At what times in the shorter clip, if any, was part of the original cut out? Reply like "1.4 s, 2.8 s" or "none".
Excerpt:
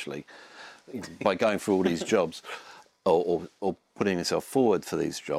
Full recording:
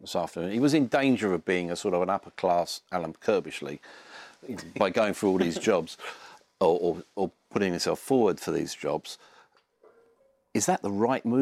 none